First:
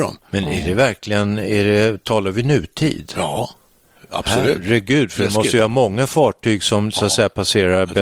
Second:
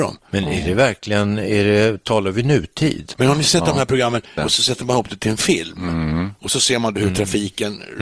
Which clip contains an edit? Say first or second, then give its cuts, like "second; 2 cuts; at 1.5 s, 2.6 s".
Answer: second; 2 cuts; at 3.1 s, 4.4 s